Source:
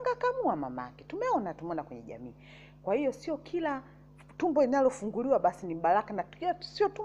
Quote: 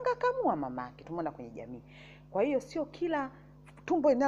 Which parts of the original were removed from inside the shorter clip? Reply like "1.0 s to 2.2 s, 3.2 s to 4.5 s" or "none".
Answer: 1.0 s to 1.6 s